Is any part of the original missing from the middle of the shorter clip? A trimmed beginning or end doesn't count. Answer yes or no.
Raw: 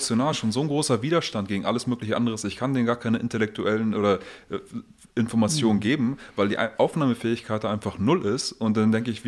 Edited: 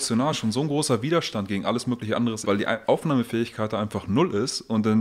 yes